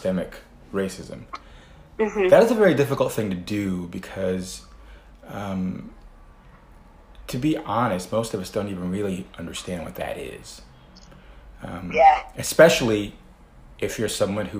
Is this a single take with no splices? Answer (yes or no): yes